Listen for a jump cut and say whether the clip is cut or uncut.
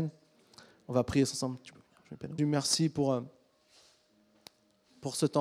cut